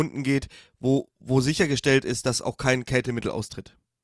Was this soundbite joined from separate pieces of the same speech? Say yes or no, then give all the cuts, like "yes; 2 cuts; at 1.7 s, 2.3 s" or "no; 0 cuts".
no; 0 cuts